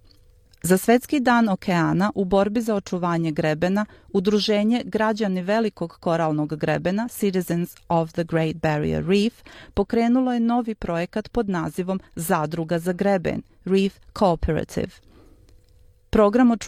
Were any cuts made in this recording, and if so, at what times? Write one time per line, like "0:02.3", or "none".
none